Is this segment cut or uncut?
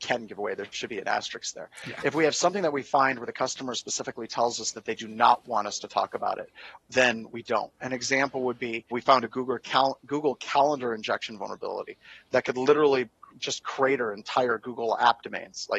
cut